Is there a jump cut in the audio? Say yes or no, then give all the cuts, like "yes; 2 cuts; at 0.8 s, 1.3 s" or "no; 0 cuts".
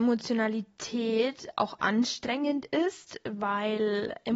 no; 0 cuts